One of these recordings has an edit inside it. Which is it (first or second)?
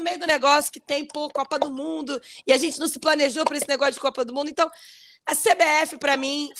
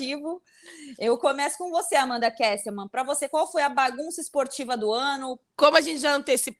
second